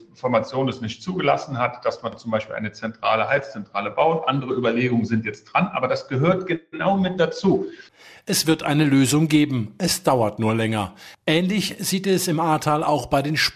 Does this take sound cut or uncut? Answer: uncut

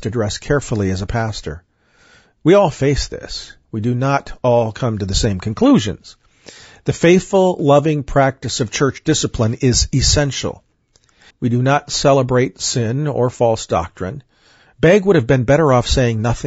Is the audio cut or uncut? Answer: cut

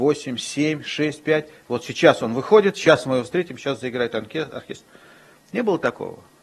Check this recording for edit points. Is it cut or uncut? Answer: uncut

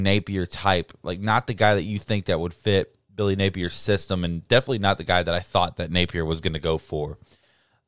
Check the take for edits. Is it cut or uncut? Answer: uncut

